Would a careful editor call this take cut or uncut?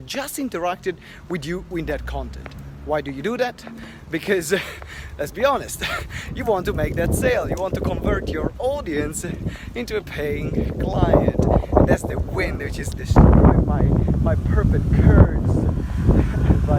cut